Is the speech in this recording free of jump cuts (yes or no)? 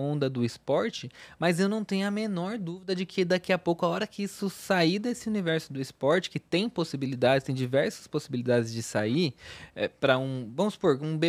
yes